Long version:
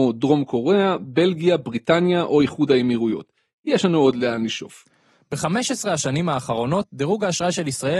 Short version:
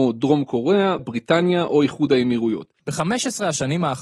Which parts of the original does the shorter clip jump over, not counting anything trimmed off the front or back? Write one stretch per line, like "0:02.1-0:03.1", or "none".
0:01.0-0:01.6
0:03.4-0:05.2